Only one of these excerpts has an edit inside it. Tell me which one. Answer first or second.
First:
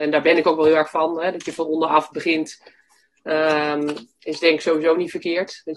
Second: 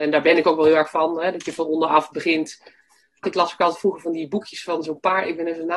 second